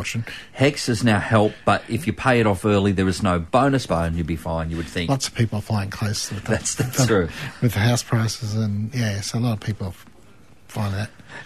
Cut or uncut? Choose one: cut